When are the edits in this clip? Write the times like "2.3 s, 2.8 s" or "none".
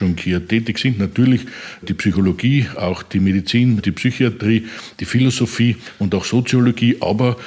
none